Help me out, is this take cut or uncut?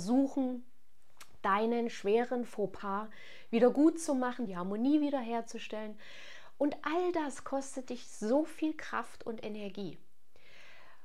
cut